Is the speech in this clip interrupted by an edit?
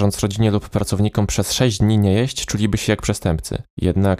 no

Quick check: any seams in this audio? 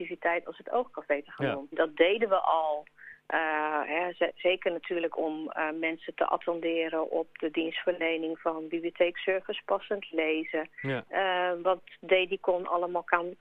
yes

